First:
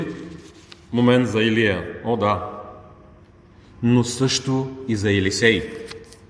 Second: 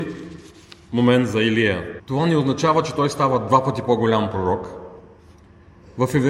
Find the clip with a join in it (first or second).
second